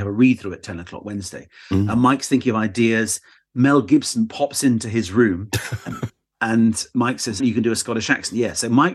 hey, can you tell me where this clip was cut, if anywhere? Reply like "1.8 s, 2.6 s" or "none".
7.4 s